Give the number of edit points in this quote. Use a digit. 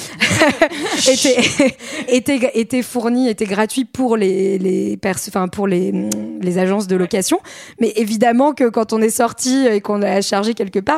0